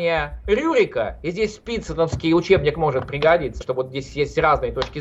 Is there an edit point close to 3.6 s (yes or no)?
yes